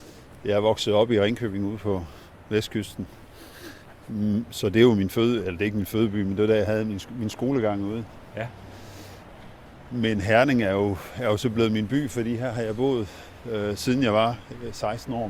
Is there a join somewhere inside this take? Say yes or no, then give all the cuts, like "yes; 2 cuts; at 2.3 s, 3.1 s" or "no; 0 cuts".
no; 0 cuts